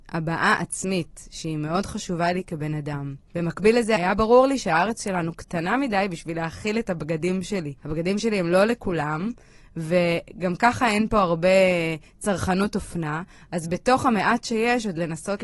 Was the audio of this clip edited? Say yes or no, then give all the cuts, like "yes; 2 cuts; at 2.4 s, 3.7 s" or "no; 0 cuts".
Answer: yes; 1 cut; at 7.8 s